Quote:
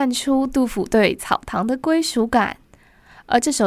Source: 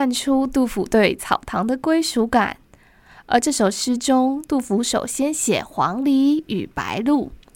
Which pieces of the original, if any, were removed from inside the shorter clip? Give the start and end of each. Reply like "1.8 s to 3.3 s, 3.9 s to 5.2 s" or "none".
none